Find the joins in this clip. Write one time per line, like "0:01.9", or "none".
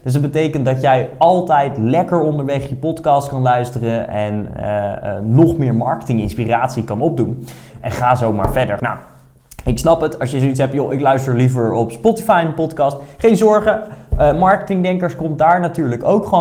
0:07.7
0:08.8